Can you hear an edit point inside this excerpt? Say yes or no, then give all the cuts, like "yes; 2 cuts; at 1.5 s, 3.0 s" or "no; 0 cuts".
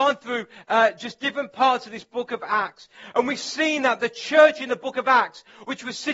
no; 0 cuts